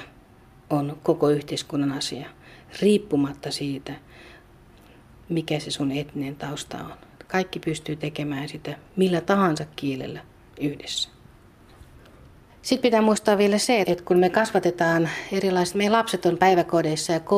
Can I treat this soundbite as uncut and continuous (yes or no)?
no